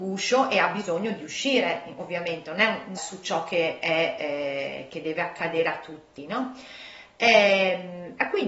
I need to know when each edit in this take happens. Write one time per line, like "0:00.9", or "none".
0:03.0